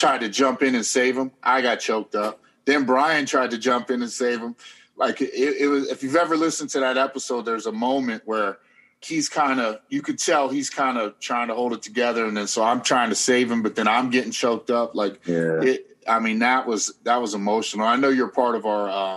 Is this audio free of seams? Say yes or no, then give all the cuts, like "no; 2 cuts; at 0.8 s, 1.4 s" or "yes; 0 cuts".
no; 1 cut; at 9.0 s